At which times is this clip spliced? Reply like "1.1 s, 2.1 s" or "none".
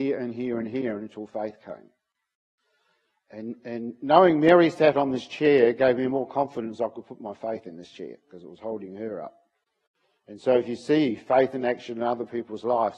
none